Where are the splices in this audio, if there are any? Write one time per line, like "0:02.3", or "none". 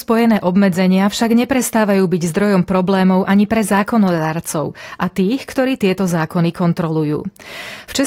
none